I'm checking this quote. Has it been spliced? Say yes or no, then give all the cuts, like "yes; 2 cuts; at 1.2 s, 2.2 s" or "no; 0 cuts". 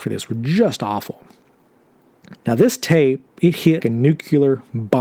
yes; 2 cuts; at 2.4 s, 3.8 s